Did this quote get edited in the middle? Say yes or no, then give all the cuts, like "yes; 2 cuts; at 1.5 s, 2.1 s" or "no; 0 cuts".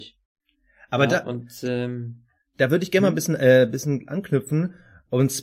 no; 0 cuts